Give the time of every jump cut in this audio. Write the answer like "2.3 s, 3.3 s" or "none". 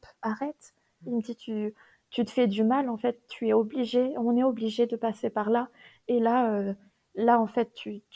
none